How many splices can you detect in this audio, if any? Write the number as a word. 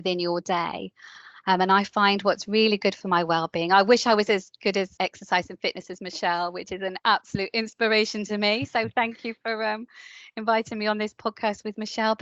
one